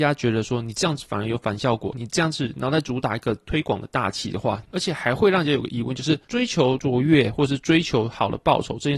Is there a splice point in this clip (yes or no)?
yes